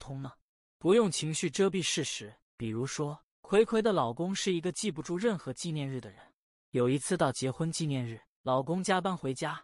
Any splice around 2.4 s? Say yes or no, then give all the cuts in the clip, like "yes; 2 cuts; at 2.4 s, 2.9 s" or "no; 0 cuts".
yes; 1 cut; at 2.4 s